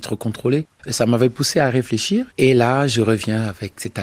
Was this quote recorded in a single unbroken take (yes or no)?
no